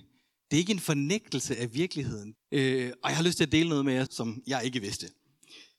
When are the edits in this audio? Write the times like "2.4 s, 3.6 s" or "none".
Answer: 2.3 s, 4.0 s

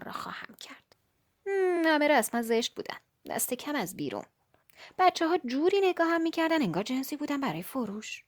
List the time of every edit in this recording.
none

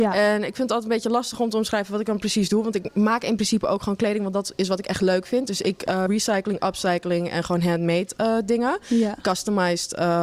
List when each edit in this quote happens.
6.1 s

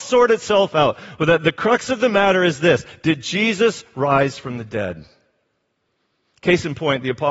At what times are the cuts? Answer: none

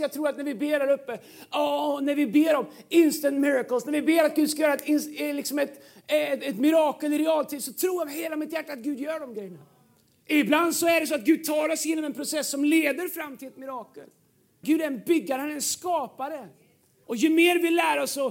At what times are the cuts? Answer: 10.2 s, 14.6 s, 17.0 s

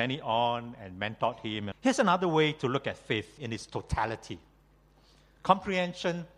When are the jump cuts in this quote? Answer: 1.7 s, 3.4 s

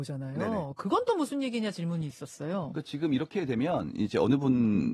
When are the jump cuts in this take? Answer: none

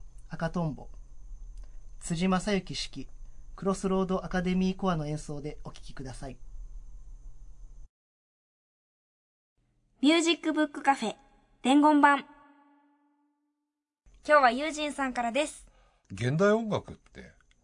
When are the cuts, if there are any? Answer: none

